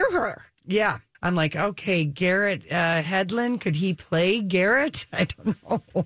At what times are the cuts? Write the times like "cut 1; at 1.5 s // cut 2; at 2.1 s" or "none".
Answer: cut 1; at 1.1 s